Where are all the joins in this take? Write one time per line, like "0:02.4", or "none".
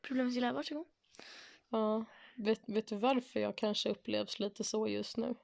0:01.6